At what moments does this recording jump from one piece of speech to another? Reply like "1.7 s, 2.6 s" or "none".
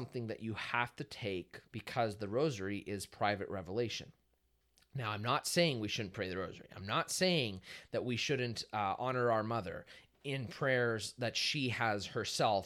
1.7 s